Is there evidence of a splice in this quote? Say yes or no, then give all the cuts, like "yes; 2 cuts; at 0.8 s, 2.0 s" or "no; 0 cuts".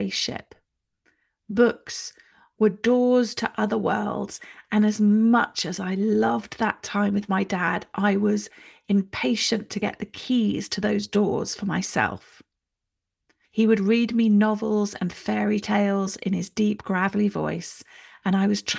yes; 1 cut; at 13.5 s